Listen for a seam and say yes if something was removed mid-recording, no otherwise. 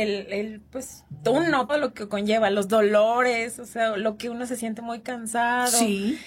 yes